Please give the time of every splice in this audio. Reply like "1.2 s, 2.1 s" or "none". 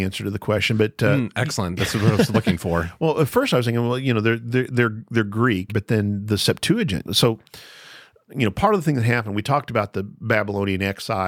5.7 s, 7.0 s

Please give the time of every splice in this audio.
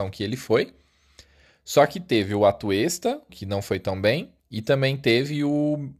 3.3 s, 4.4 s

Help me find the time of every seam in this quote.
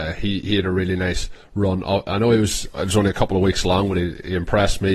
none

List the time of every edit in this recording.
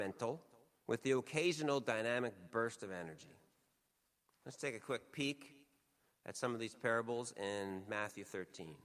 4.3 s

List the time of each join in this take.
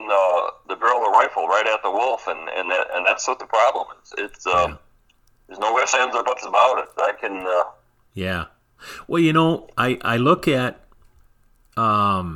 none

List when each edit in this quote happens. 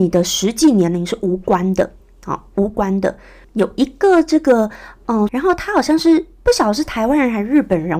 3.4 s, 5.3 s

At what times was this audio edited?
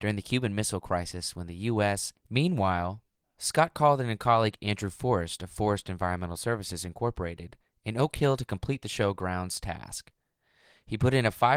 2.1 s

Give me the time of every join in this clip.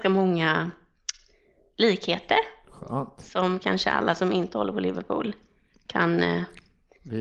none

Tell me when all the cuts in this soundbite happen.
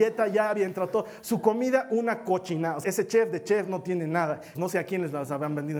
2.8 s, 4.5 s

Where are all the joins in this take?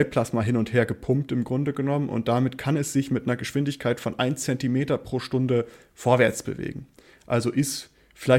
none

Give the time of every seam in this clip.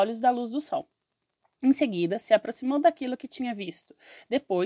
none

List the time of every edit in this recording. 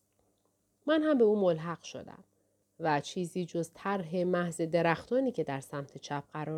2.6 s

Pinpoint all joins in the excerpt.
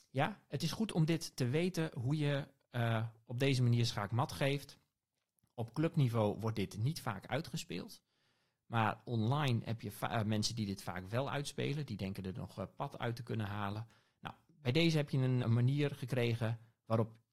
15.4 s

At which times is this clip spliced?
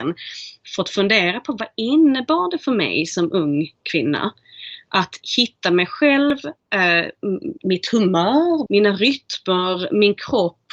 7.6 s, 8.7 s

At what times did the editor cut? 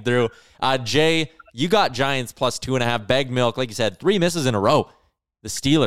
none

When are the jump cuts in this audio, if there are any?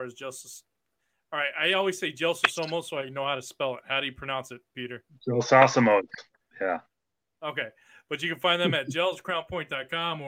6.4 s

